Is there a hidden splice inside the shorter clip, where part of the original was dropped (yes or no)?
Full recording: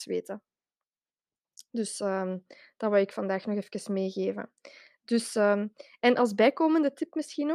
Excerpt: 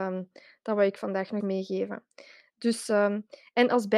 yes